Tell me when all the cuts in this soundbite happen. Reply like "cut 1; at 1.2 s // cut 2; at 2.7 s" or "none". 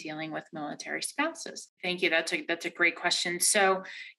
cut 1; at 1.8 s